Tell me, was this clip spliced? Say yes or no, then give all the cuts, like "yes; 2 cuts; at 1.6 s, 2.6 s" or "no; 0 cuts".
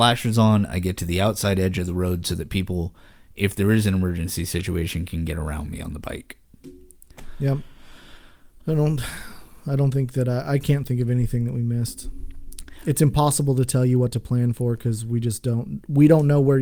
yes; 1 cut; at 8.6 s